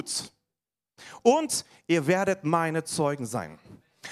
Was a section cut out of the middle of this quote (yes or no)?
yes